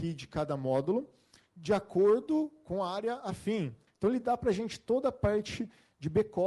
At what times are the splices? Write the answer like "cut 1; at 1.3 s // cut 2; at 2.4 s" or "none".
cut 1; at 3.9 s